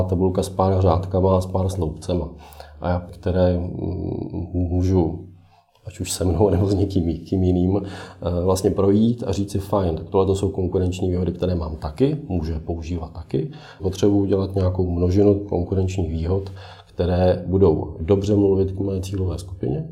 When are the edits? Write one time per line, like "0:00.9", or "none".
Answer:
0:03.1
0:13.8